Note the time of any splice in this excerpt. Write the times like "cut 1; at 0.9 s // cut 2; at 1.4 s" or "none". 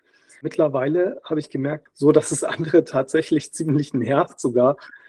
cut 1; at 1.9 s